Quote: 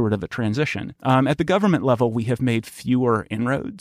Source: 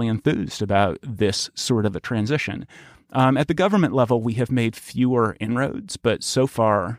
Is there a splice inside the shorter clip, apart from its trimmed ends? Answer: yes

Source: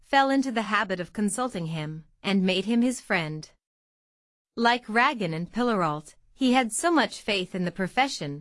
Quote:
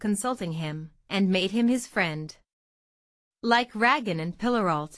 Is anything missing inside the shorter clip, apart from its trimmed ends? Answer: no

